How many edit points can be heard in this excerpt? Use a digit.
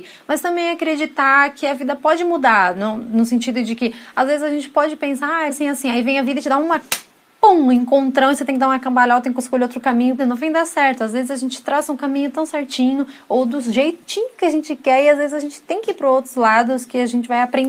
2